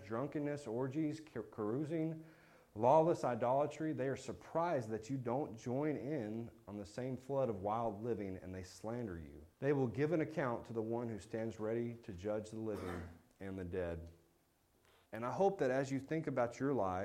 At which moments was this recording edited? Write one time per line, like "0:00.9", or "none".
0:09.5
0:15.1